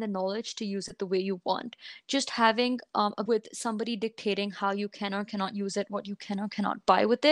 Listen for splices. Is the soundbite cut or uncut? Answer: cut